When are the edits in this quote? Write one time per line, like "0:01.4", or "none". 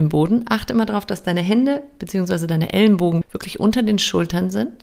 0:03.2